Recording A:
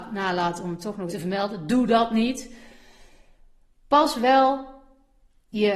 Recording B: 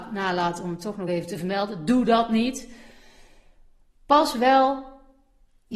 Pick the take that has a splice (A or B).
A